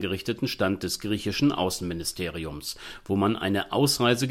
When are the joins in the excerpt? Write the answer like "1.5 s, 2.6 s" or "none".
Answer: none